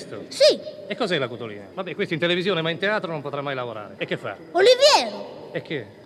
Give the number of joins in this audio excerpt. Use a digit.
2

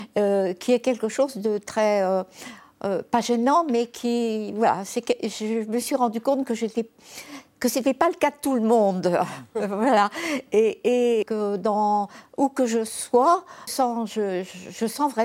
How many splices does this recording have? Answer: 2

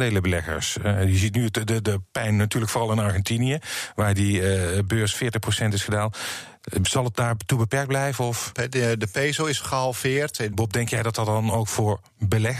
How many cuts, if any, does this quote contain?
2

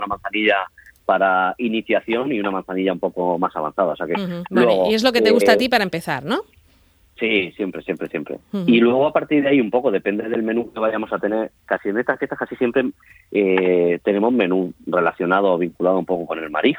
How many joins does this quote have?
1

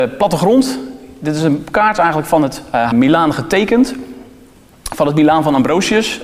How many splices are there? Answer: 1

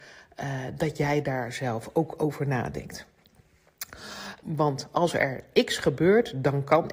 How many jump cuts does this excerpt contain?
1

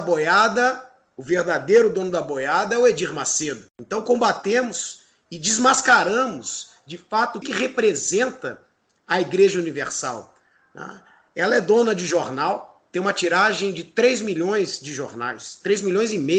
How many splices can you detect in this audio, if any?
1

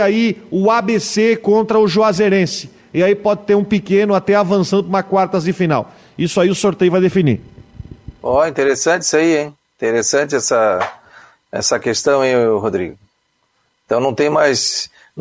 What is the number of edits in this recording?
0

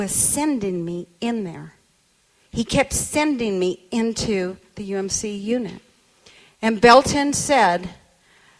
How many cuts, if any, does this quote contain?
0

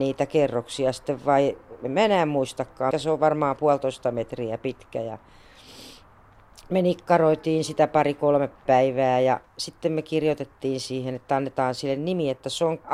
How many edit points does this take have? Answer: 1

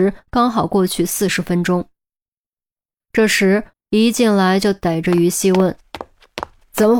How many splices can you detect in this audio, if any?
1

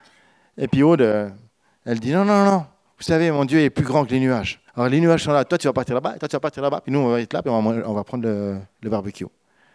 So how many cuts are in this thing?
1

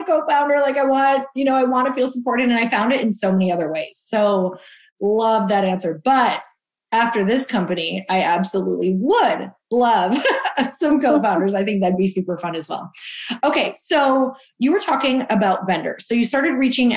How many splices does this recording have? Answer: 0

